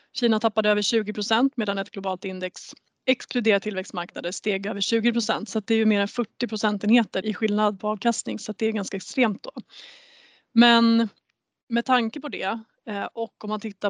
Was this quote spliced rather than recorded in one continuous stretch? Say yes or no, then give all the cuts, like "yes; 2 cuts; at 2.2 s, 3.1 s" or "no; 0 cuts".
yes; 1 cut; at 7.2 s